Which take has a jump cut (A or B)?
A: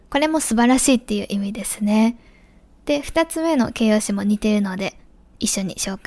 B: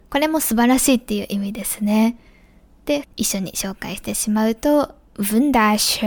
B